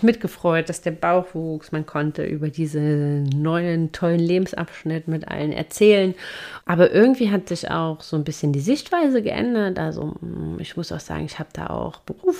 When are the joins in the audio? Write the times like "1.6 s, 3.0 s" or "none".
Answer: 6.6 s